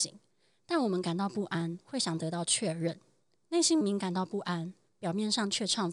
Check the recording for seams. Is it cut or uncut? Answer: cut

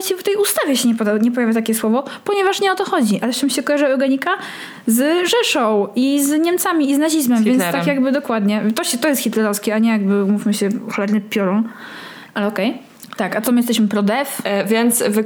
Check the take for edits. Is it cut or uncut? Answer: cut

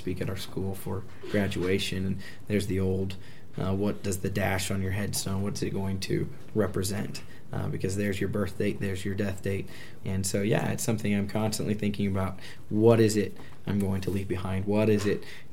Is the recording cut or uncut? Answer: cut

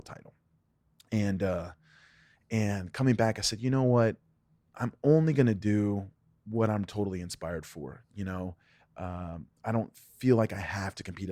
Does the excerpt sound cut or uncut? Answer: uncut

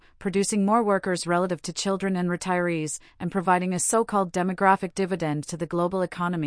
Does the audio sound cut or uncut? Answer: uncut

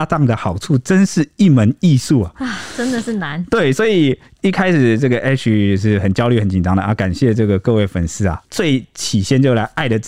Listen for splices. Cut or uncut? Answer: uncut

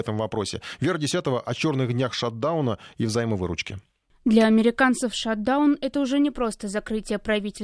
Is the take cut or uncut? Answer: uncut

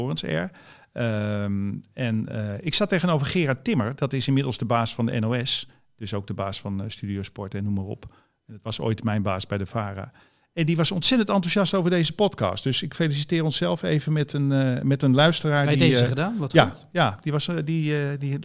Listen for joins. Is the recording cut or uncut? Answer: uncut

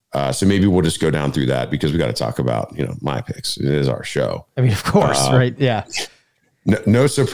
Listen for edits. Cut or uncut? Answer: uncut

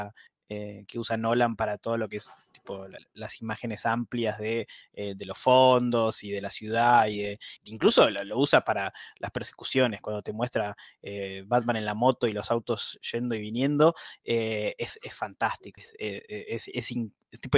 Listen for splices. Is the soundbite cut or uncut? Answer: uncut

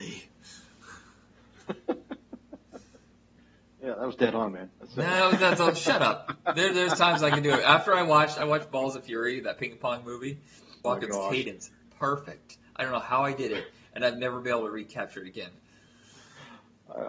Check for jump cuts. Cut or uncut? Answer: cut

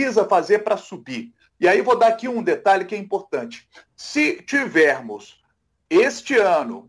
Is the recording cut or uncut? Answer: cut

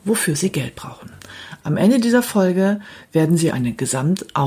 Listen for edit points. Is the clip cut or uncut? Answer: cut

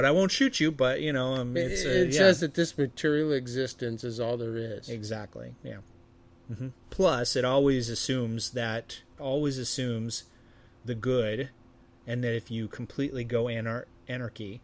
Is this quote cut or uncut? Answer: cut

